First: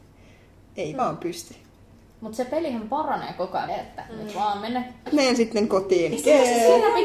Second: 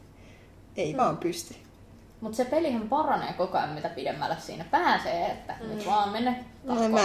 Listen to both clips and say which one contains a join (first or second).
first